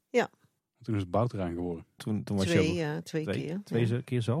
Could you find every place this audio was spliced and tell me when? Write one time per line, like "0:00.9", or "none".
0:02.0